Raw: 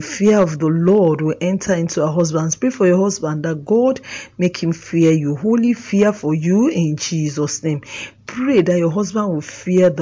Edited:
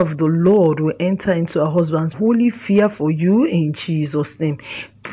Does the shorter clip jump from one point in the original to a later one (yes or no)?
yes